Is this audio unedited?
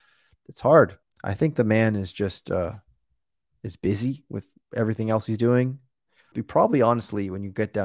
no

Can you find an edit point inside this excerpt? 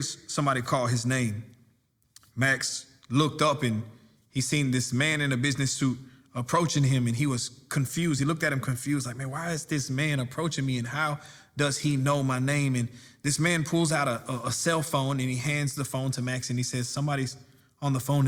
no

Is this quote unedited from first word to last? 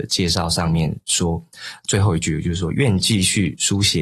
yes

